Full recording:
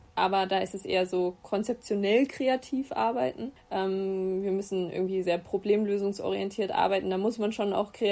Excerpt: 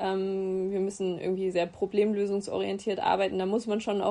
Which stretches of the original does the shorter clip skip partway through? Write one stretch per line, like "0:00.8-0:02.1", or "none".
none

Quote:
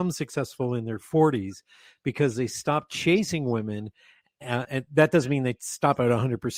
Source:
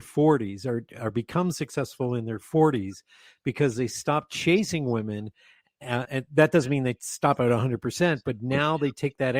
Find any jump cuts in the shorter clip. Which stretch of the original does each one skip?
none

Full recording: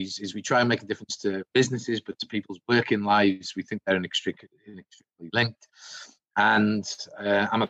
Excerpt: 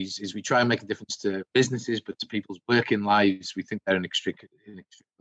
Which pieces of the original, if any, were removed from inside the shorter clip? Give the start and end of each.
none

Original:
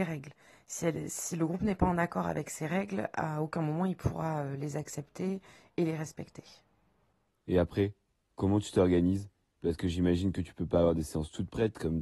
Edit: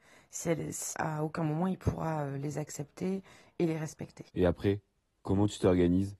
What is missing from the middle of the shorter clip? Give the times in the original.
0:01.3-0:03.1
0:06.5-0:07.4

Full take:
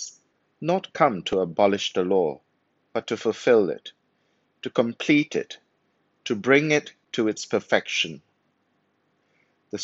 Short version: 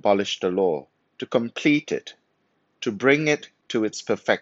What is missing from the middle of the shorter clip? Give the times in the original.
0:02.5-0:04.4

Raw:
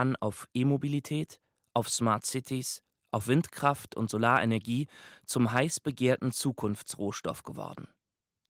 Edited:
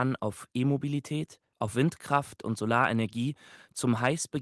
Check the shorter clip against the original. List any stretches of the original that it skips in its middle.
0:01.5-0:03.0

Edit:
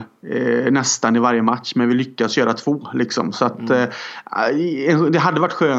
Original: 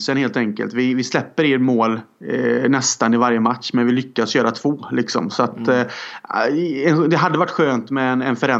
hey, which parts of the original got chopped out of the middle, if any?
none

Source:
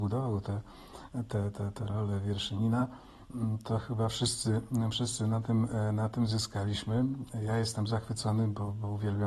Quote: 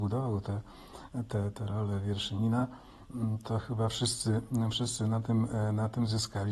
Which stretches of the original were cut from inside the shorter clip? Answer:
0:01.5-0:01.7

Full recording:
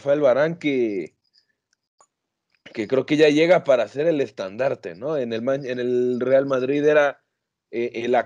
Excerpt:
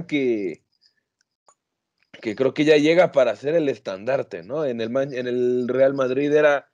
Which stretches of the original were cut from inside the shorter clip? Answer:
none

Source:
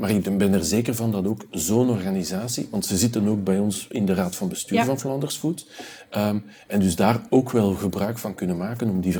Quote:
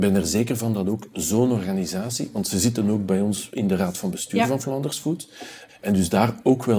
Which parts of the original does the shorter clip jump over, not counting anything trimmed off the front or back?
0:06.1-0:06.5

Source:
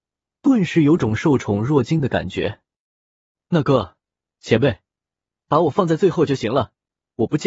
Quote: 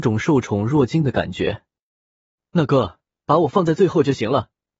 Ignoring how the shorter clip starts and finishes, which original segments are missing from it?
0:04.1-0:05.4

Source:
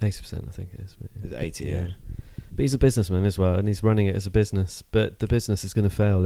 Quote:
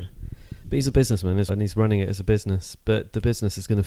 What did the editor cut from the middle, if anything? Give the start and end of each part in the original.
0:03.3-0:03.5

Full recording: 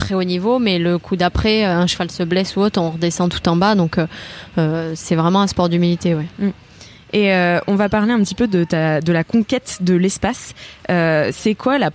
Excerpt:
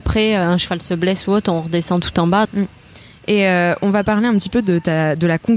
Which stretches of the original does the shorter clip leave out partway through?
0:03.7-0:06.3

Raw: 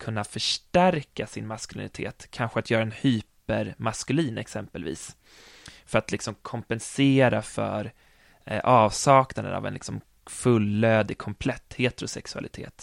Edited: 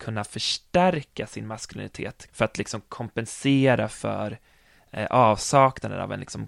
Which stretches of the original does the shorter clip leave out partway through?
0:02.3-0:05.8

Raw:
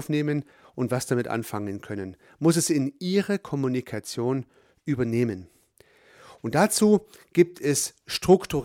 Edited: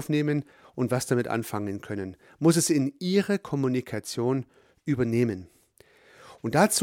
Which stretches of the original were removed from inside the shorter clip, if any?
none

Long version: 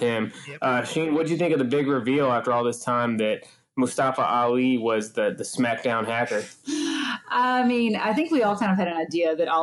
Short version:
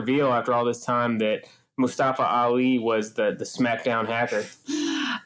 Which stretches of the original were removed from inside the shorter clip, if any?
none

